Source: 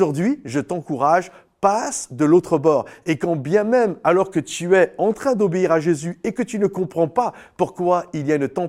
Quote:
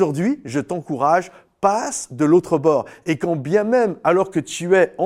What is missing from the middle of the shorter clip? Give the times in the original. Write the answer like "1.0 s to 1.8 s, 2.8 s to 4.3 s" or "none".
none

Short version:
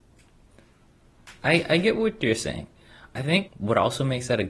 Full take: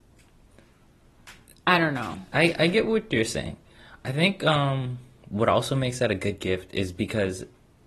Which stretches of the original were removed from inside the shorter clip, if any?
1.4 s to 2.3 s, 4.4 s to 5.2 s

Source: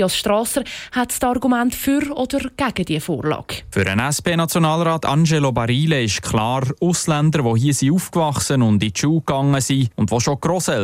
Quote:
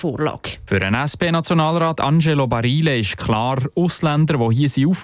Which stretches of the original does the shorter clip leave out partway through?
none

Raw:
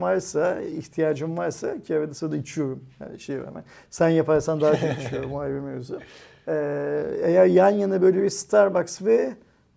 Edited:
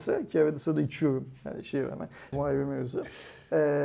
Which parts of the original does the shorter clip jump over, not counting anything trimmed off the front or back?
3.9 s to 5.3 s

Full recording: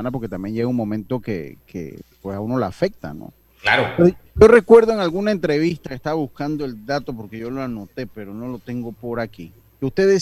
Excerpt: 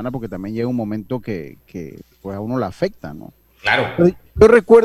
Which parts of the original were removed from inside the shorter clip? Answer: none

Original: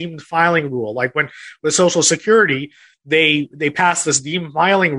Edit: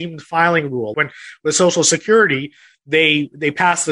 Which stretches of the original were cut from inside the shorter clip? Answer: 0.9 s to 1.1 s

